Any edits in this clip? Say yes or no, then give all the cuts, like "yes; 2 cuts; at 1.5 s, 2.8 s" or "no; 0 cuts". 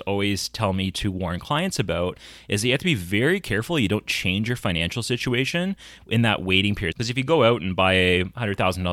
yes; 1 cut; at 6.9 s